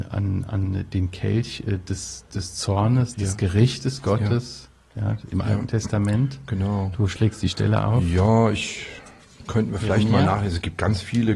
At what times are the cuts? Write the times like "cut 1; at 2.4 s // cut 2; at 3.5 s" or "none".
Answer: none